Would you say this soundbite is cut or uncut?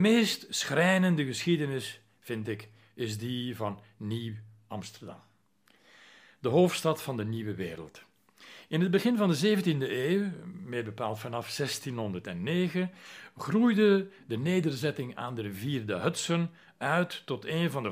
uncut